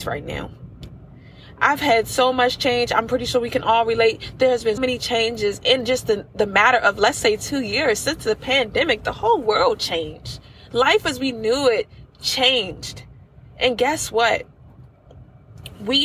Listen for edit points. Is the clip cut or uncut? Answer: cut